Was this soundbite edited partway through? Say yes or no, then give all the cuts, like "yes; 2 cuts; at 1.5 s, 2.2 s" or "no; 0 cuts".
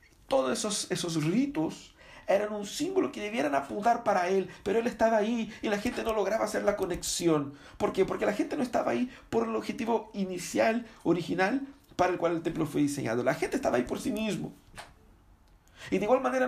no; 0 cuts